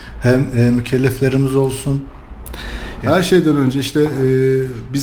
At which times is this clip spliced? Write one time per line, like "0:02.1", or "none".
0:03.0